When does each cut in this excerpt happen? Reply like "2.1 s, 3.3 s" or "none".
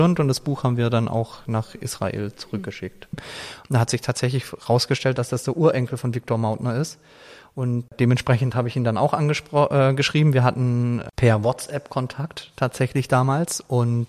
3.1 s